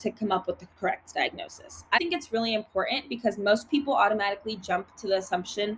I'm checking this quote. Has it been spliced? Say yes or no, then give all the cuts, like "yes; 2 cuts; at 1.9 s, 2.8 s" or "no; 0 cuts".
yes; 1 cut; at 2.0 s